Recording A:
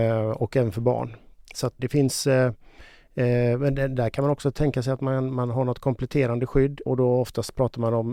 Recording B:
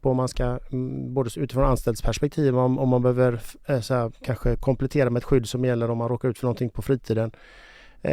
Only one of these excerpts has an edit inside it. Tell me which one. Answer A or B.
A